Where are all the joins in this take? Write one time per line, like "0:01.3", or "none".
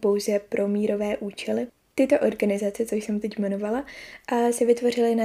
none